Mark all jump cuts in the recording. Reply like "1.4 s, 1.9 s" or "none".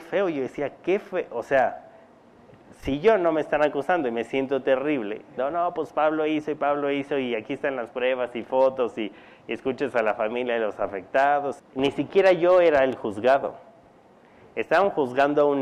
5.4 s, 11.6 s

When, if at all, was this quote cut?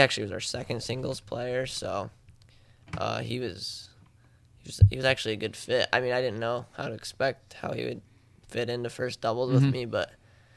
none

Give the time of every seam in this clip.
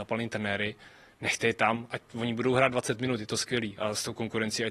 none

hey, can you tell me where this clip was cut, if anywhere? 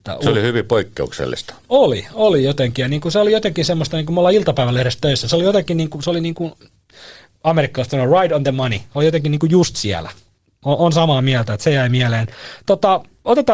none

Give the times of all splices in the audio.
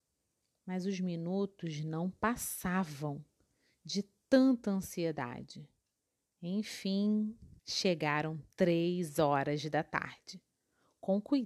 7.6 s

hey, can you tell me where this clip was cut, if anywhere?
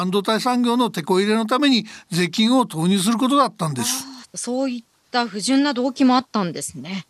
4.2 s

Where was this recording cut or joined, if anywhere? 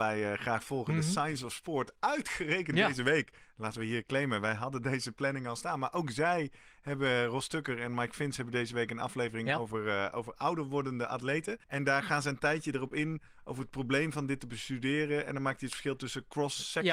11.6 s

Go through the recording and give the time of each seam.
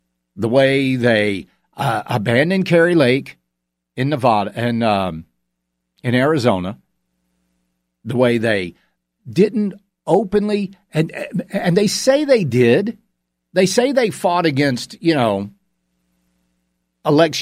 none

